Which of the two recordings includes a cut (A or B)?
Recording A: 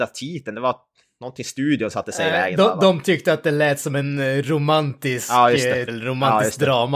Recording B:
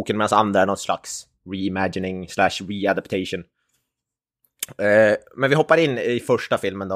A